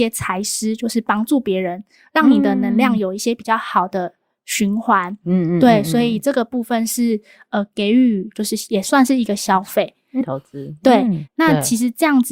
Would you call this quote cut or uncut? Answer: cut